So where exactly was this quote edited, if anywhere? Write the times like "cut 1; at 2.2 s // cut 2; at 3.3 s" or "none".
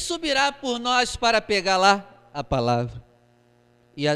none